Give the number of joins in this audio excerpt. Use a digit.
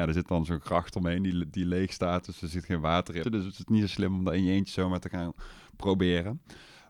1